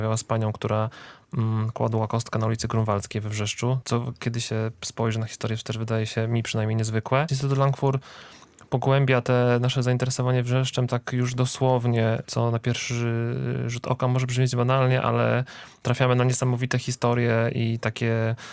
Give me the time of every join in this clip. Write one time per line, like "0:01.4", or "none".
0:03.8
0:07.3
0:12.2